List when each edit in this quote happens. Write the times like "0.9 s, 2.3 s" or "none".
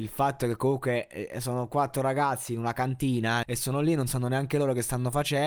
3.4 s